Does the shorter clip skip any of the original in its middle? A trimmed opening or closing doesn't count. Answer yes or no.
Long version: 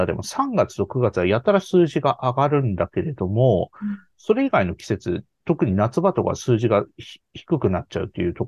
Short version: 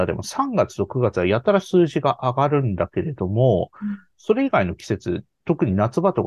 no